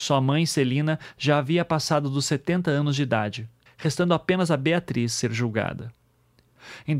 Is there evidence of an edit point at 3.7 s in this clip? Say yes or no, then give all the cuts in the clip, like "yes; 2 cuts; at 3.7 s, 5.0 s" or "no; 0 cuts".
yes; 1 cut; at 3.7 s